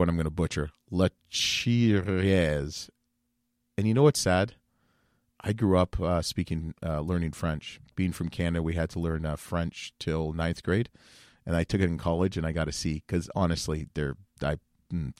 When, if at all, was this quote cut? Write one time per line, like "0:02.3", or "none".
none